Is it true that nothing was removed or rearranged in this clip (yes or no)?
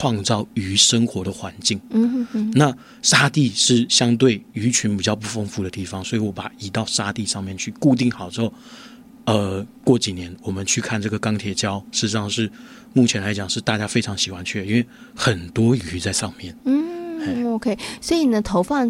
yes